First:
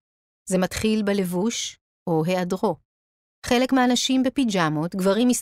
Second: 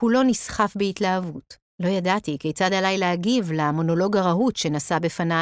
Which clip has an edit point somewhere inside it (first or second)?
second